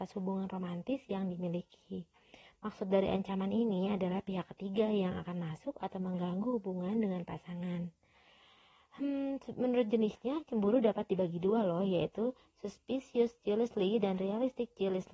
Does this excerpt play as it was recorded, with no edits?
yes; 0 cuts

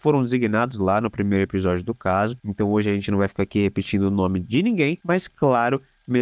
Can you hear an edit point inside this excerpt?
no; 0 cuts

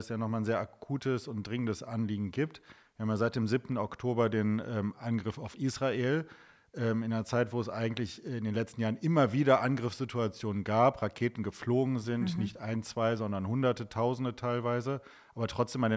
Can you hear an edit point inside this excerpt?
no; 0 cuts

